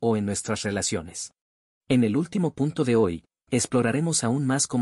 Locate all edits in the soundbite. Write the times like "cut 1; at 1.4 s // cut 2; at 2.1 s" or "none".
cut 1; at 1.8 s